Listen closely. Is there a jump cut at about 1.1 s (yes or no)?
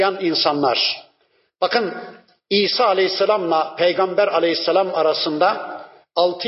no